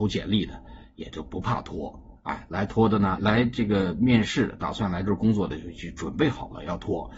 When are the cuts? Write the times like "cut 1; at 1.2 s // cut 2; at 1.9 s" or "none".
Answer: cut 1; at 3.2 s